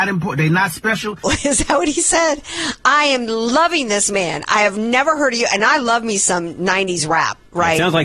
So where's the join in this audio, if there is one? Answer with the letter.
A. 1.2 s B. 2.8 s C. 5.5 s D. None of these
A